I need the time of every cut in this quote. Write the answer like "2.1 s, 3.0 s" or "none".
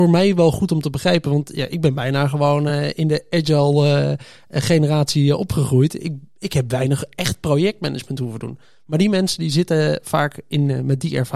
none